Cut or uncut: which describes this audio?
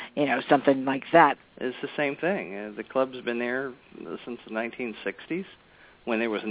cut